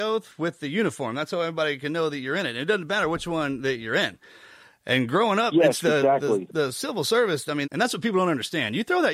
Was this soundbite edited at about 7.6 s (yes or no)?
yes